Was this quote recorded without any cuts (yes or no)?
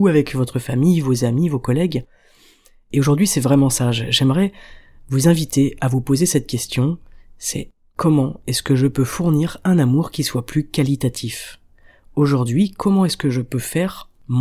yes